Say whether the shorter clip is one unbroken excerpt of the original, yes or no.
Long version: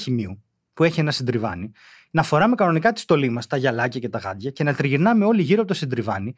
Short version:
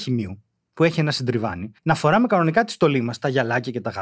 no